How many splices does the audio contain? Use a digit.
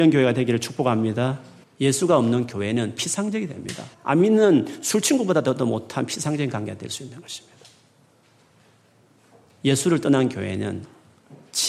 2